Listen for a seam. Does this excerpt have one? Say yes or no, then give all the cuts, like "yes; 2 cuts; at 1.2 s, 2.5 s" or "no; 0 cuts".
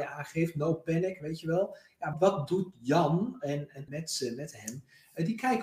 yes; 2 cuts; at 2.1 s, 3.9 s